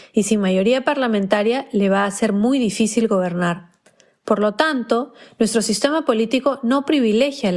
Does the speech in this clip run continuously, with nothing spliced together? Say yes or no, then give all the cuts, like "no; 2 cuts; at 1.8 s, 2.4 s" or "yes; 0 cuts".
yes; 0 cuts